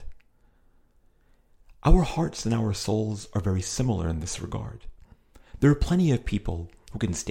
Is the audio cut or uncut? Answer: uncut